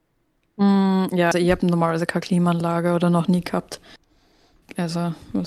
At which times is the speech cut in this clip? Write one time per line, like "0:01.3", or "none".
0:01.3